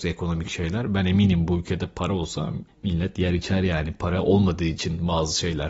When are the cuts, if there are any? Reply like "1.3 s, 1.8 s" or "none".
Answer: none